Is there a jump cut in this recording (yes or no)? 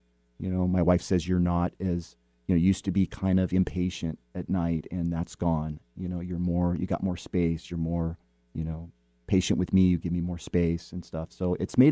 no